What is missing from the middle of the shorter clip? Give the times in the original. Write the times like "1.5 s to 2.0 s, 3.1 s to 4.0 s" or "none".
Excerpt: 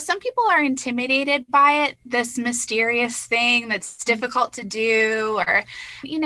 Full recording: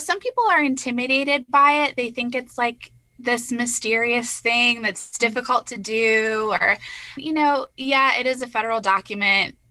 2.0 s to 3.1 s